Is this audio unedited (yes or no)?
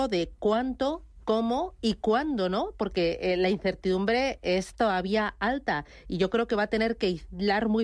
yes